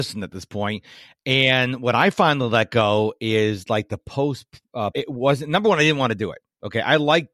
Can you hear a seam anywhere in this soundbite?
yes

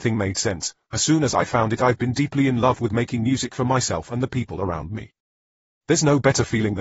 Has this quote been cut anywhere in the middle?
no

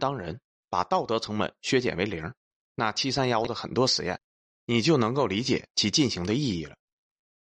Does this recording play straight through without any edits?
yes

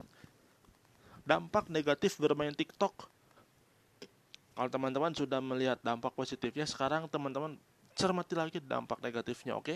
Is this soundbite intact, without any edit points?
no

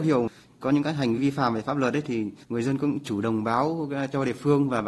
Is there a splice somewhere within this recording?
yes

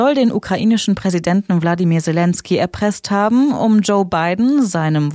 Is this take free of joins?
yes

